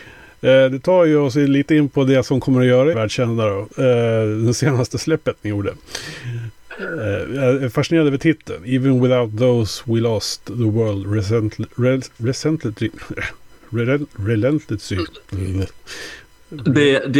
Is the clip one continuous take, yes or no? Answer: no